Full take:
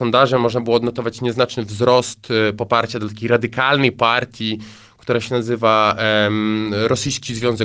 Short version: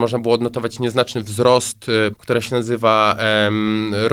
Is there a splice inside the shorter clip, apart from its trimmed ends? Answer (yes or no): yes